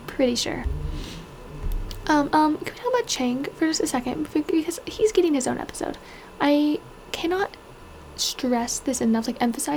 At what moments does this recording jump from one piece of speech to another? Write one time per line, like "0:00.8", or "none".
0:02.3